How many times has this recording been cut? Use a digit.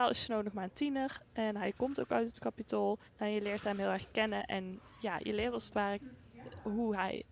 1